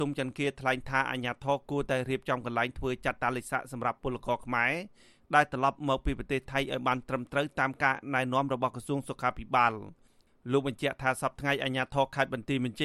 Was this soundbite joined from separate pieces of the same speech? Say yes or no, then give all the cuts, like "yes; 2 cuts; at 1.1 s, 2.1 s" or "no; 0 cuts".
no; 0 cuts